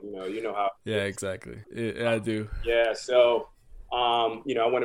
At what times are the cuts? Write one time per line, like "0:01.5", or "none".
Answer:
0:01.6

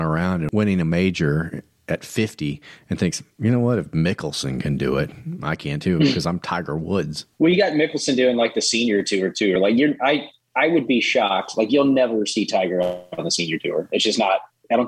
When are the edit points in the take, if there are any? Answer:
none

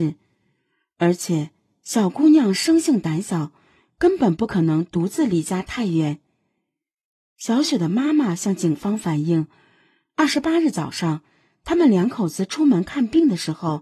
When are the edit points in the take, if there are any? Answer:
none

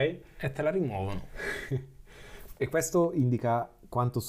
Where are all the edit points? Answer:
none

